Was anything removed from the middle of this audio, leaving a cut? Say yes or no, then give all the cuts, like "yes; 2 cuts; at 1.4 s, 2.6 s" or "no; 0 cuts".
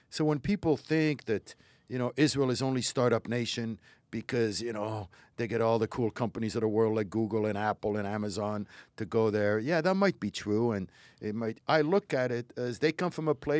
yes; 1 cut; at 11.6 s